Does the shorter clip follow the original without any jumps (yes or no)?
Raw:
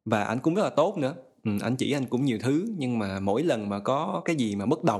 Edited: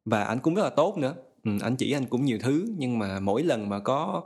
yes